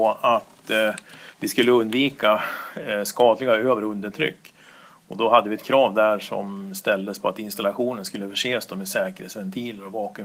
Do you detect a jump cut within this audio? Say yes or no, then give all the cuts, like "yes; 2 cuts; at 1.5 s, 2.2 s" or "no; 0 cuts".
no; 0 cuts